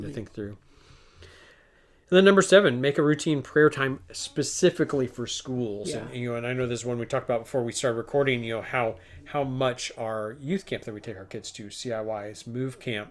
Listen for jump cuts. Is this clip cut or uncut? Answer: uncut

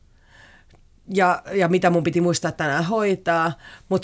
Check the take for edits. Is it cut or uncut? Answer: uncut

